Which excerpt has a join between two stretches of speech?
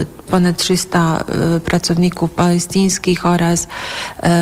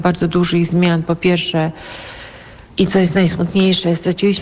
second; 1 cut; at 2.7 s

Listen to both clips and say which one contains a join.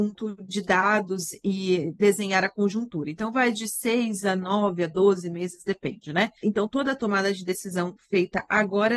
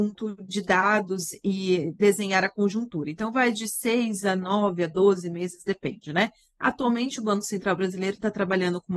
first; 1 cut; at 6.4 s

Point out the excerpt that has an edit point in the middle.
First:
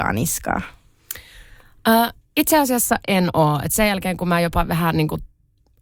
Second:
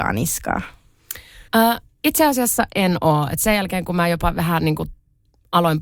second; 1 cut; at 1.5 s

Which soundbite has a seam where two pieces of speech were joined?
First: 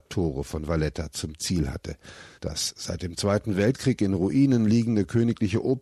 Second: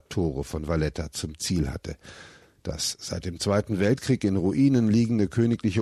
first; 1 cut; at 2.3 s

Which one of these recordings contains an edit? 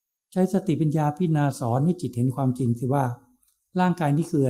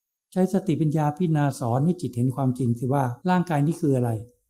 second; 1 cut; at 3.2 s

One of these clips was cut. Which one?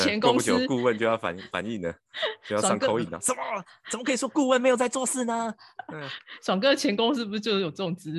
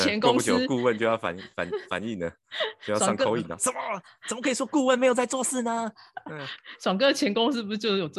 first; 1 cut; at 1.5 s

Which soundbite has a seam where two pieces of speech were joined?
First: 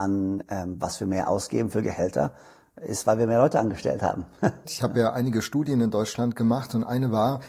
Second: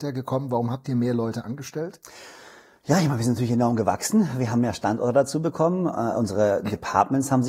first; 1 cut; at 4.7 s

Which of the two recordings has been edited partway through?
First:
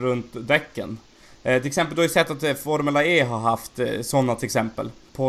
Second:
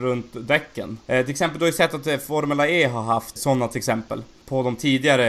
second; 2 cuts; at 1.0 s, 3.4 s

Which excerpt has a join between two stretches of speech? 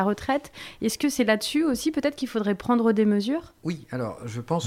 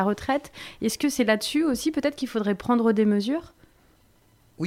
first; 1 cut; at 3.6 s

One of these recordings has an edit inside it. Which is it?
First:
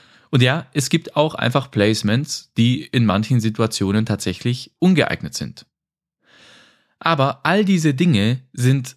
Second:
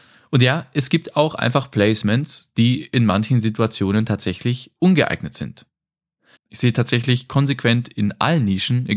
second; 1 cut; at 6.4 s

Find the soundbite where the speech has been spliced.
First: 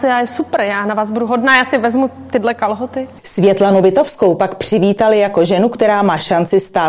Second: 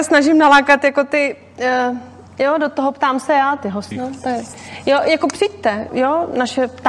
second; 2 cuts; at 3.9 s, 5.9 s

